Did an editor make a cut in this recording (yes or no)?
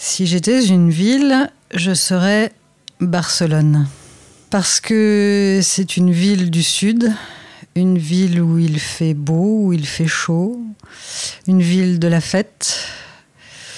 no